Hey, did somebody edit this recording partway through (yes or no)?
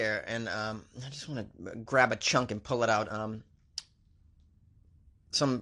no